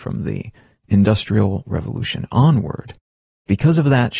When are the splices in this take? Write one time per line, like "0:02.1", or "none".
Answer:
none